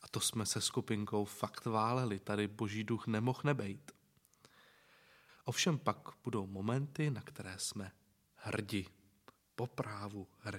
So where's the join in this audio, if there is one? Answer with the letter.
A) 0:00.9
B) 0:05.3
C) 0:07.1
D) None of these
B